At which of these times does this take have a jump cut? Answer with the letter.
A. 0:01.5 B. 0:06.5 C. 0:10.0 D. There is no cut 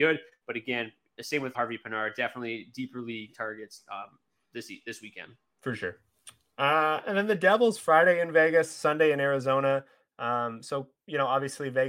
A